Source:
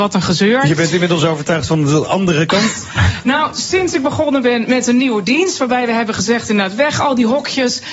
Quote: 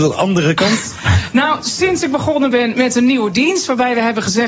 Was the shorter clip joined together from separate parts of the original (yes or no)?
no